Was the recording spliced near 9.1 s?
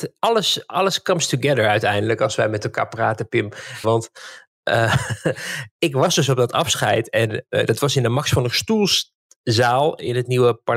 no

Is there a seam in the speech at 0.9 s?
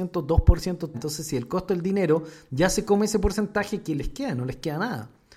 yes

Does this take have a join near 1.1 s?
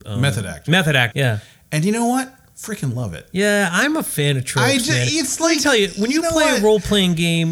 yes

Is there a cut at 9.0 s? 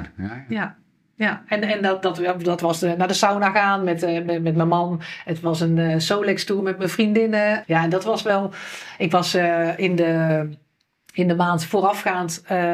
no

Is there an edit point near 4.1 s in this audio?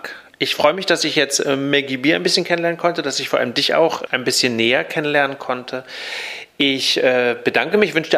yes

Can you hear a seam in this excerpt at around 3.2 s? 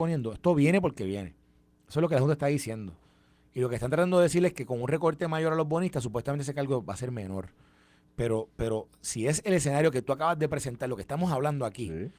no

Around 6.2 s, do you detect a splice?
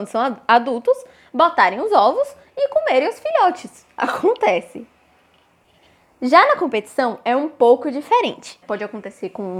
no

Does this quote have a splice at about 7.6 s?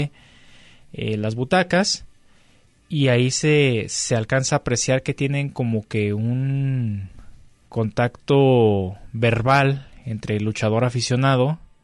yes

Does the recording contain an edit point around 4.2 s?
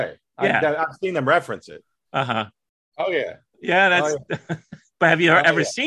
no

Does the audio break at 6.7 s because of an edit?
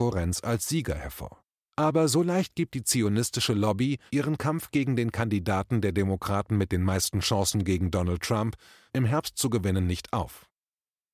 no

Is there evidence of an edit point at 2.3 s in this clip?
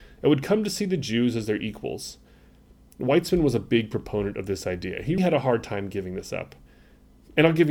no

